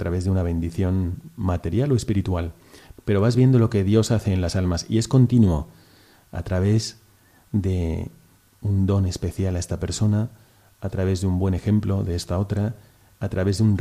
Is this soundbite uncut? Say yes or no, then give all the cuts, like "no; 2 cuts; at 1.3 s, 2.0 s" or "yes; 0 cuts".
no; 1 cut; at 3.0 s